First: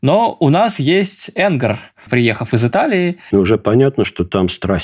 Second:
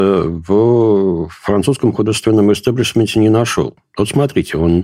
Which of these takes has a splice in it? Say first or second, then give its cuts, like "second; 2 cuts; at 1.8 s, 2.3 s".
first; 2 cuts; at 2.1 s, 3.3 s